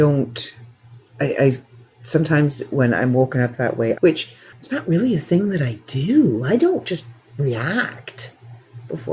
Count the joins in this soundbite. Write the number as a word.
one